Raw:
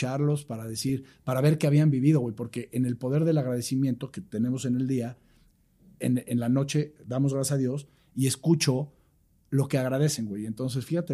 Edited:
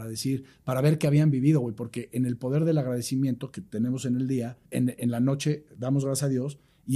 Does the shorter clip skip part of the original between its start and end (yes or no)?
yes